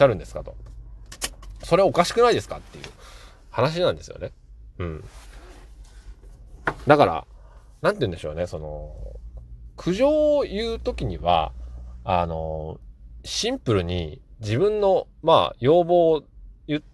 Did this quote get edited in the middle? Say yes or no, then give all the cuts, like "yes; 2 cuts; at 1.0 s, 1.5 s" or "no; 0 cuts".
no; 0 cuts